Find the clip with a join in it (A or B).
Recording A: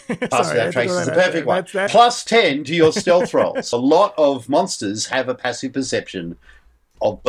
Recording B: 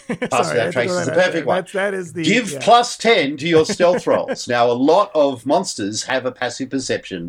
A